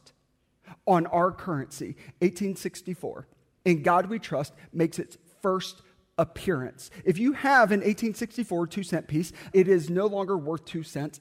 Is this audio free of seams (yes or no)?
no